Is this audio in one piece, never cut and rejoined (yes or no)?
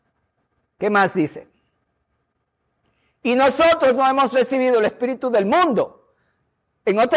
yes